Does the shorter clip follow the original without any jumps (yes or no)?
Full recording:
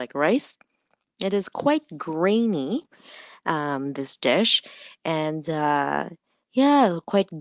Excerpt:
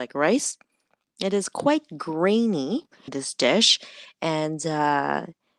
no